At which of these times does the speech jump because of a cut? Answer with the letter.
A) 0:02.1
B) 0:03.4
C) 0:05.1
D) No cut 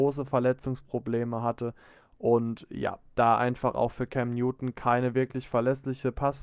D